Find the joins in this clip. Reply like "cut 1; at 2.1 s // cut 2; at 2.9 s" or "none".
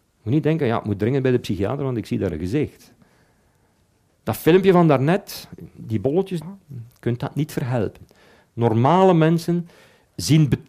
cut 1; at 6.4 s